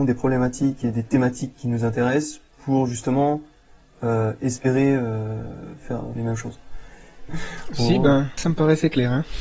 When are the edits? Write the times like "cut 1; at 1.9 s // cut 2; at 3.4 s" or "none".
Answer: cut 1; at 6.2 s // cut 2; at 7.3 s // cut 3; at 8.4 s